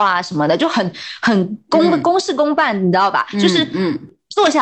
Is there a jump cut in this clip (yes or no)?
no